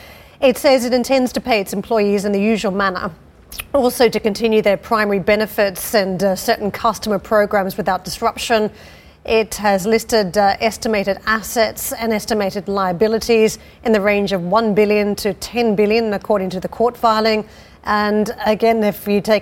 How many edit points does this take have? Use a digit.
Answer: 0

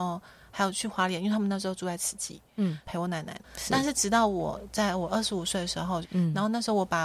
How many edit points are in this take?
2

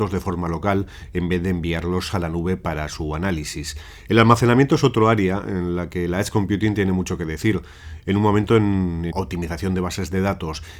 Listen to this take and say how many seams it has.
1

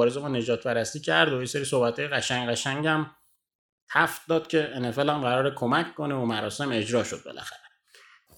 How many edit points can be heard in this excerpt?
0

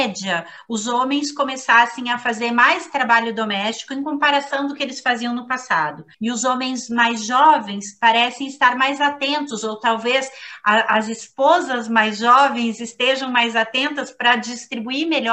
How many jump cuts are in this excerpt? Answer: 1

